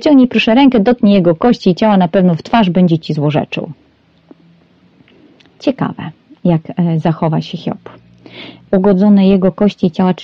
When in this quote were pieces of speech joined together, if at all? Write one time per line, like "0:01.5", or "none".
none